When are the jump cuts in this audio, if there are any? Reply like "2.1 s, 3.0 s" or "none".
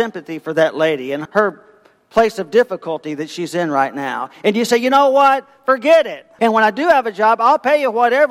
1.3 s, 6.4 s